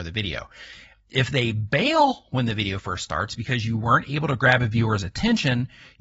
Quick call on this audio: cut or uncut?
uncut